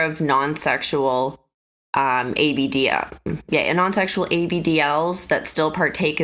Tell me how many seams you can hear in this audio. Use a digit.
0